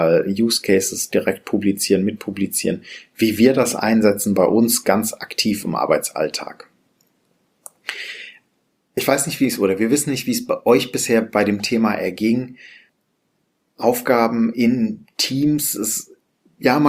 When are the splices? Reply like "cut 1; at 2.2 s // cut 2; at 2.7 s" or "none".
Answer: none